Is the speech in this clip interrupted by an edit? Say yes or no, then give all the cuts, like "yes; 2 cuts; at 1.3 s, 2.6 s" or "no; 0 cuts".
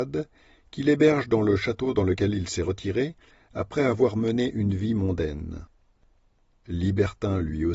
no; 0 cuts